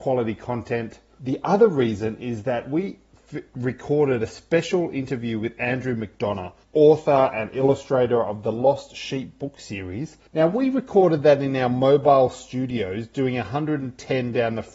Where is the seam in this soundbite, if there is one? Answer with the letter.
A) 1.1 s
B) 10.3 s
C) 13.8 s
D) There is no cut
B